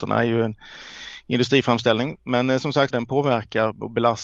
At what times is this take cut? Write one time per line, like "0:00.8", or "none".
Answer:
0:02.9